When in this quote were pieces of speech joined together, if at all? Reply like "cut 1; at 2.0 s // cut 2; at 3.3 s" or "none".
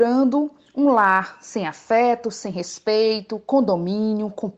none